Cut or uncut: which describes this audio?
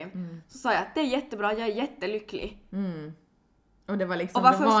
uncut